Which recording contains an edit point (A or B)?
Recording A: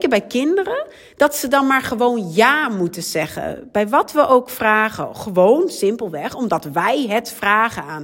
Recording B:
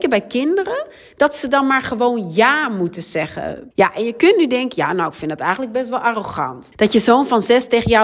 B